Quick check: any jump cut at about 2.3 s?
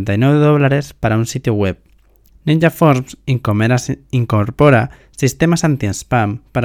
yes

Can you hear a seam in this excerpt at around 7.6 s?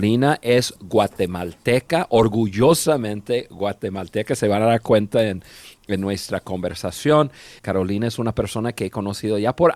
yes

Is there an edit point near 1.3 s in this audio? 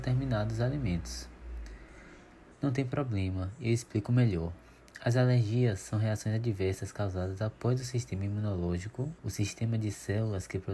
no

